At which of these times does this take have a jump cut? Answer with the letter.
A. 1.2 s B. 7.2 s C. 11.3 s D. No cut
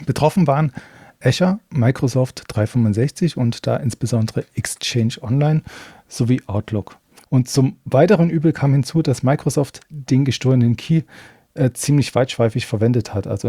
B